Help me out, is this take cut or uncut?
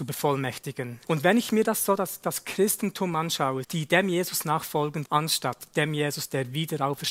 cut